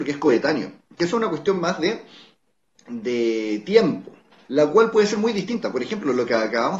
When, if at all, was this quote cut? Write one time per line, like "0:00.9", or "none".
0:04.4